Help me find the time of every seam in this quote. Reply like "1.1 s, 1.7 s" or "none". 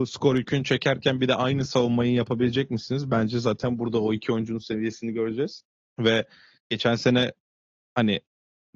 5.8 s